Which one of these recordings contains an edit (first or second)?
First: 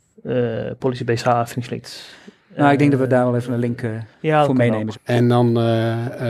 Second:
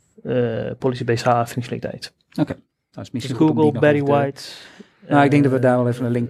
first